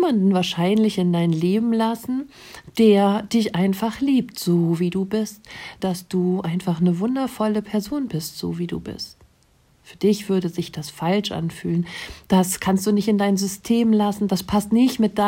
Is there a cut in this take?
yes; 1 cut; at 5.8 s

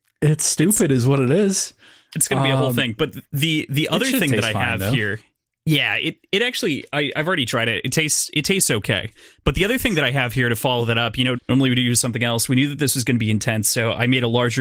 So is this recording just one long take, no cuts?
no; 1 cut; at 11.3 s

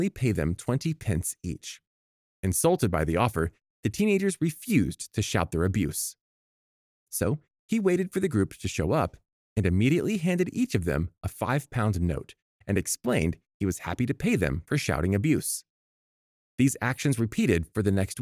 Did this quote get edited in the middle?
yes; 1 cut; at 7.0 s

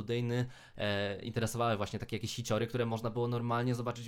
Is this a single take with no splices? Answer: yes; 0 cuts

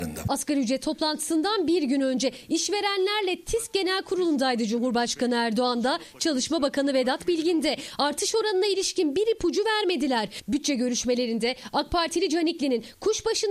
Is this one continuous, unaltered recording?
yes; 0 cuts

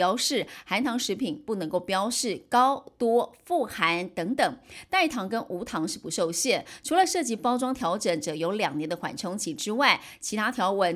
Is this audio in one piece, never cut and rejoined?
yes; 0 cuts

